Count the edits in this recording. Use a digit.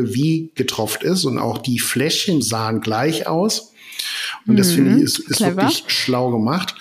1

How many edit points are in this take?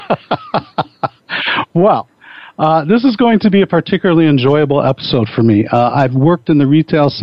0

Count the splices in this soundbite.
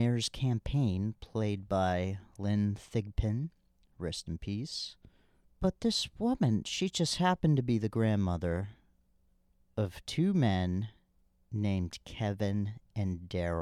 1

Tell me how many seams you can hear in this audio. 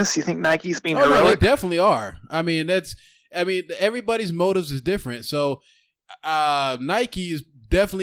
0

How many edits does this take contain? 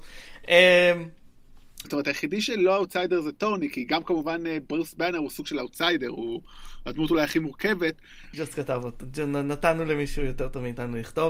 2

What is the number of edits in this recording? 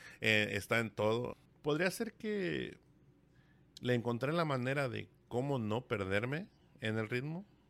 1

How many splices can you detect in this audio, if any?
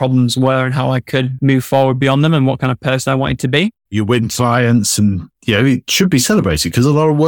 1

